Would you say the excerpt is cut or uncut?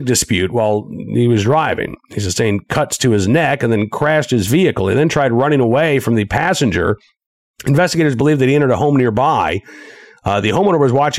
uncut